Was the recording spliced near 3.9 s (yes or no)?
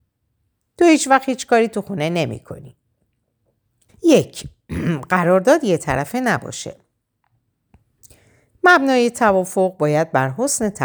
yes